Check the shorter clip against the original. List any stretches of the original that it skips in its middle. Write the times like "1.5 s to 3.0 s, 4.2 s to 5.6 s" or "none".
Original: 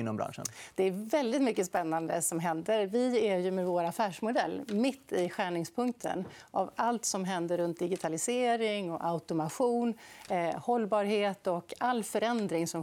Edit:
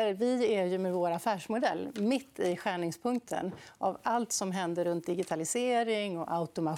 none